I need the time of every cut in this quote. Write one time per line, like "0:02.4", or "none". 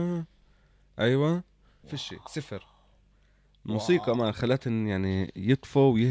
0:01.8